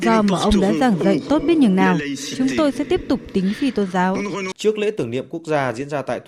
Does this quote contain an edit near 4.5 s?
yes; 1 cut; at 4.5 s

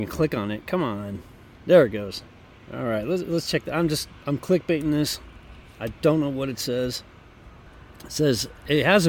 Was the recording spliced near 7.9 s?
no; 0 cuts

